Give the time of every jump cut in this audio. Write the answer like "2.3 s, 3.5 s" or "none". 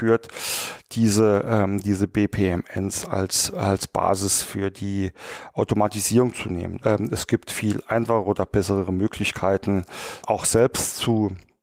6.8 s, 10.2 s